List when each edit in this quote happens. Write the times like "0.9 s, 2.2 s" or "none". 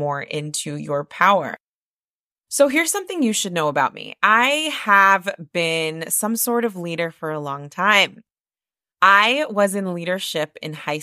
none